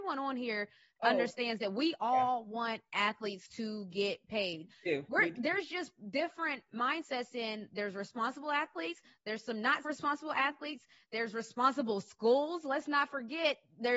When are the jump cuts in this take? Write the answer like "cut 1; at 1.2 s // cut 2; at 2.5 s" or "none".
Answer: cut 1; at 9.8 s